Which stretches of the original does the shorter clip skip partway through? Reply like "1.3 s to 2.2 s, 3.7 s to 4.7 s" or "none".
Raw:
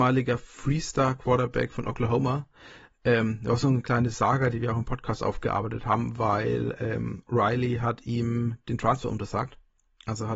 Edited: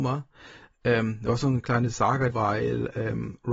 4.5 s to 6.2 s